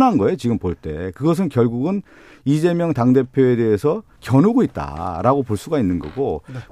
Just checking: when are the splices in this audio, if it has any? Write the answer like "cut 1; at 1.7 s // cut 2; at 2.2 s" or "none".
none

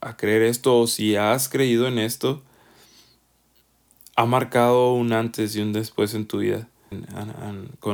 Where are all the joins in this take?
cut 1; at 6.9 s

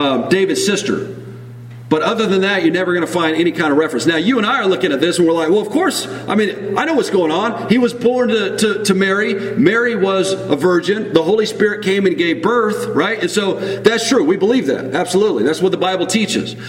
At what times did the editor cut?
none

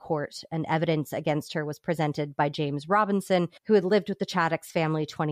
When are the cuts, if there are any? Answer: cut 1; at 3.6 s

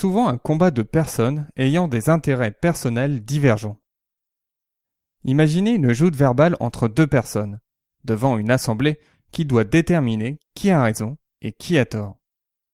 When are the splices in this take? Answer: none

